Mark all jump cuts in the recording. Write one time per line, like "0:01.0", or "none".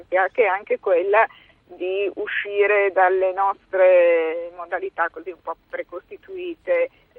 none